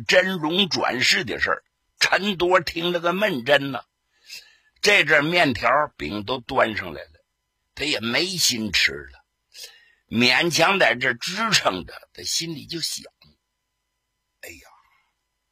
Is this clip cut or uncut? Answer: cut